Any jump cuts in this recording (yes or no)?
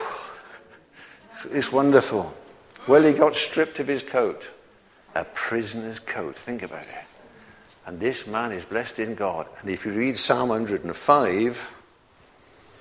yes